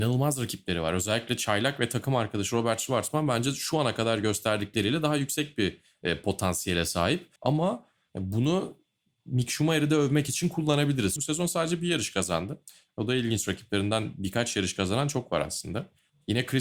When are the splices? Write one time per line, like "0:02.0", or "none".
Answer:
0:07.4
0:11.2